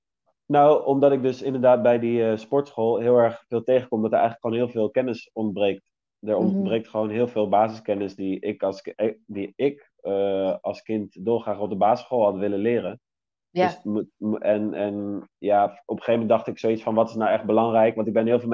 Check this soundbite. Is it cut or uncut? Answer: uncut